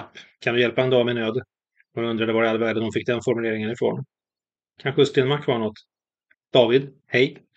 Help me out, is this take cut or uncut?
cut